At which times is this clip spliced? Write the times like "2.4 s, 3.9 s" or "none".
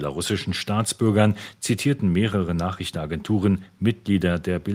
1.6 s